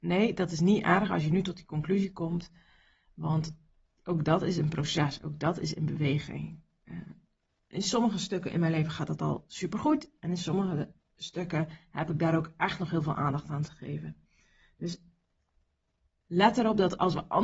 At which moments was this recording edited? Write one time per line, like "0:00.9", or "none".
none